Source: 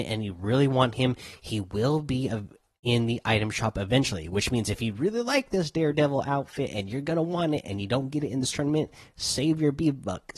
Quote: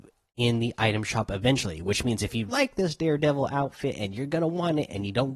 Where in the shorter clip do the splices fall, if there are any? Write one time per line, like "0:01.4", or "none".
0:02.5